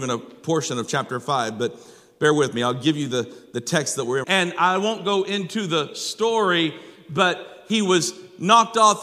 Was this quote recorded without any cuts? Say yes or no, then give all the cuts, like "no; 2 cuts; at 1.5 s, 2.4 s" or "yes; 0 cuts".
no; 1 cut; at 4.2 s